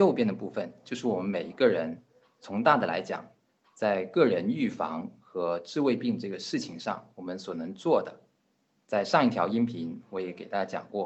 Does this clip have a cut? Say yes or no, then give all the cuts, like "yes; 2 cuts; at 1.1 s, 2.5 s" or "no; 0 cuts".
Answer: no; 0 cuts